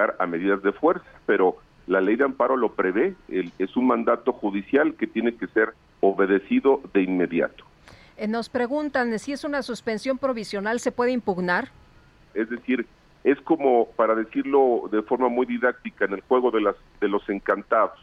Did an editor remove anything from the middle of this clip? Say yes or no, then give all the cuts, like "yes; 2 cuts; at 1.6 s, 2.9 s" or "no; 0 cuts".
yes; 2 cuts; at 1.2 s, 12.3 s